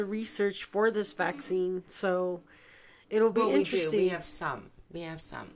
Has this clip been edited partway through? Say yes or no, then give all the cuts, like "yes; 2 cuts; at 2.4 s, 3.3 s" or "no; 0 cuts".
no; 0 cuts